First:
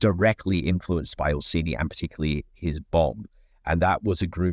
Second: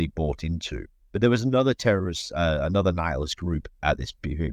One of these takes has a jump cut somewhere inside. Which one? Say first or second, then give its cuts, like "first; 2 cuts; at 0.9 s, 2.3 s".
second; 1 cut; at 1.1 s